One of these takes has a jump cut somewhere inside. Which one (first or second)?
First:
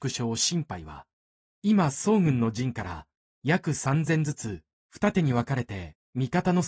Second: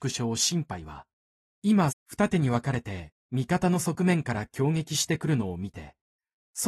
second